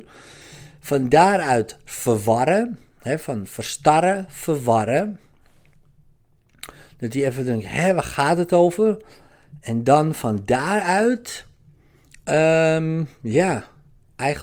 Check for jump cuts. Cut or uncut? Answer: uncut